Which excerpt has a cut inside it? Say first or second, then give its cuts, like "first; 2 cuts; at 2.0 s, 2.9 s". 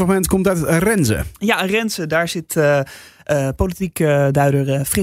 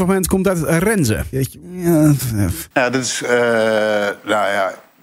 second; 2 cuts; at 1.3 s, 2.7 s